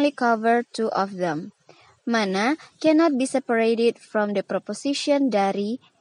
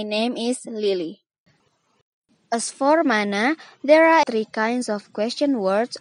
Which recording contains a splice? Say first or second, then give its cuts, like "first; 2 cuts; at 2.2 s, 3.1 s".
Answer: second; 1 cut; at 4.2 s